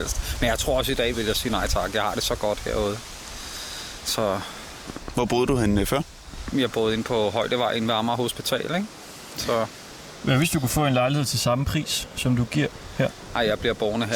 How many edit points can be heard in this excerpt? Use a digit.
1